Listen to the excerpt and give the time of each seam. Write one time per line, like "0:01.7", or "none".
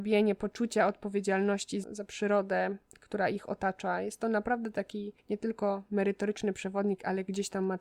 0:01.8